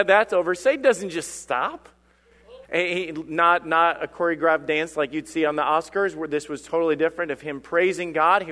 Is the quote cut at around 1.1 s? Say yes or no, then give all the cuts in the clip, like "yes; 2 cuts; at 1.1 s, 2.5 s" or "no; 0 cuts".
no; 1 cut; at 2.6 s